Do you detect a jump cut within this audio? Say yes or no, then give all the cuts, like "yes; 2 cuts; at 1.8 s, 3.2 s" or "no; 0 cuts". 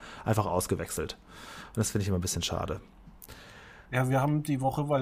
no; 0 cuts